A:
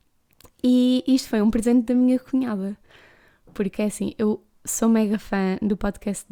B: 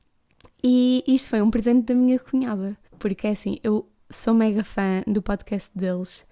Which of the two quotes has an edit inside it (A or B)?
B